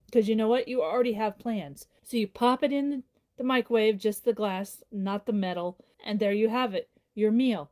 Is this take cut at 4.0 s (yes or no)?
no